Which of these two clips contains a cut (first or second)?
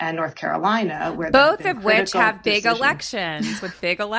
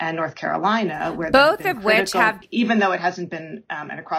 second